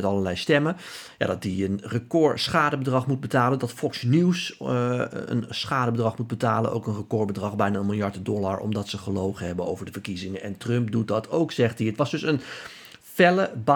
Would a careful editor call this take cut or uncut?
uncut